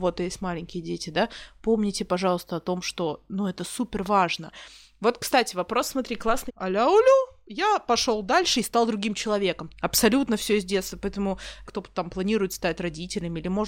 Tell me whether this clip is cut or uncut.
cut